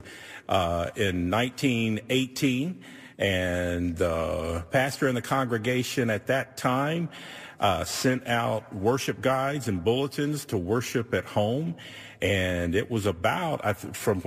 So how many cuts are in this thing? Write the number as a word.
zero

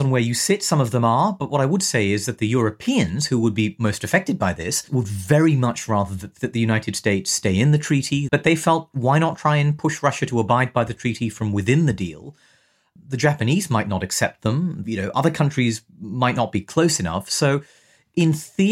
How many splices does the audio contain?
two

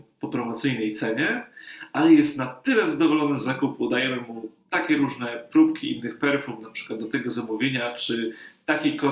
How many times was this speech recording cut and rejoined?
zero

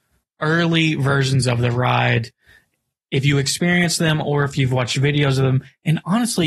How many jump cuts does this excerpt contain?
zero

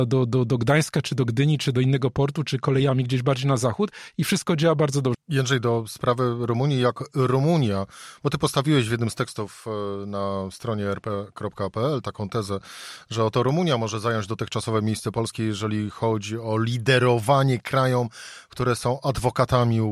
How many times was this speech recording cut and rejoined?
one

